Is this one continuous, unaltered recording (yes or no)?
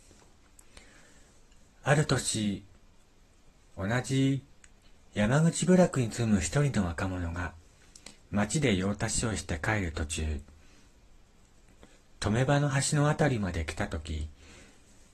yes